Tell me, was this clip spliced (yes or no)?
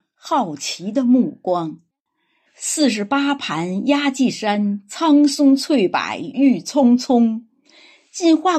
yes